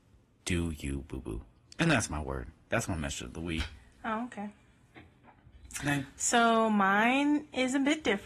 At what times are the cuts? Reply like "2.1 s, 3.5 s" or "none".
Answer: none